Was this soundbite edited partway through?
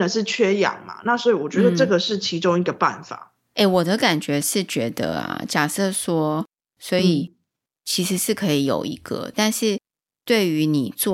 yes; 2 cuts; at 6.7 s, 9.3 s

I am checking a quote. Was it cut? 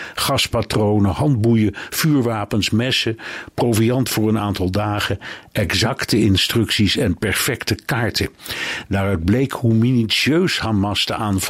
yes; 1 cut; at 8.9 s

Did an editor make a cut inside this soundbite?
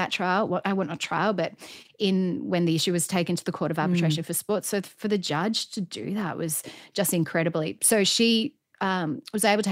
no; 0 cuts

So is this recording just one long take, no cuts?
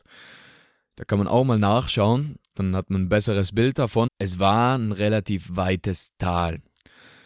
no; 1 cut; at 4.1 s

